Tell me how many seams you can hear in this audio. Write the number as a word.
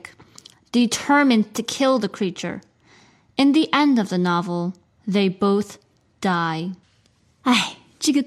zero